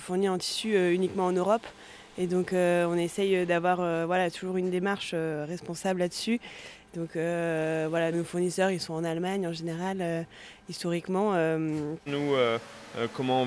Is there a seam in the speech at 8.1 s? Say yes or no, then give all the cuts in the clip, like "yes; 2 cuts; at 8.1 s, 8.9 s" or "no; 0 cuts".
yes; 2 cuts; at 8.1 s, 12.1 s